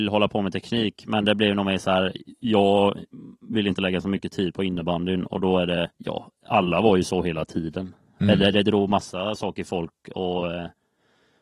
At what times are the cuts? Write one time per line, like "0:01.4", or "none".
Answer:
0:05.9